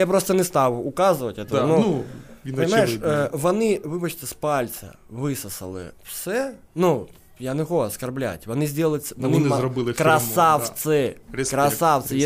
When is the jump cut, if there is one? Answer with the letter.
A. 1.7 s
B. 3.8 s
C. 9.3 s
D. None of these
D